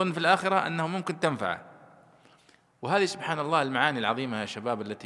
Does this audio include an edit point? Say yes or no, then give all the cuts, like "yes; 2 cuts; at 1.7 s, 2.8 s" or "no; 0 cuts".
no; 0 cuts